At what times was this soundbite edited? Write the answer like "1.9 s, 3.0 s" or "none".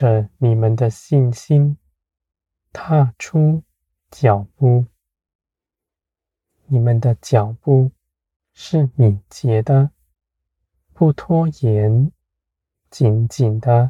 none